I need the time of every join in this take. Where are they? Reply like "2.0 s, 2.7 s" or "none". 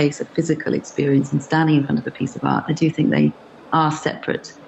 none